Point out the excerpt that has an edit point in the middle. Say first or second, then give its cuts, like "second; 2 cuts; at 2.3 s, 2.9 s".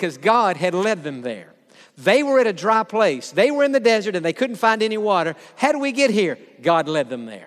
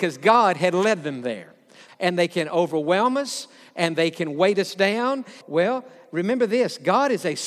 second; 2 cuts; at 1.9 s, 5.4 s